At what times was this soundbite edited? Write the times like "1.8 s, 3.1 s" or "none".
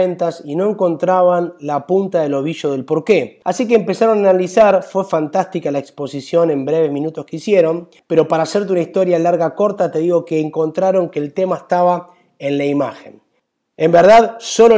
none